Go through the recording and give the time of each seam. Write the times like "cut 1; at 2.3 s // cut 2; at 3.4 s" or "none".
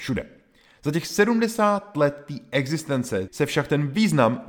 cut 1; at 3.3 s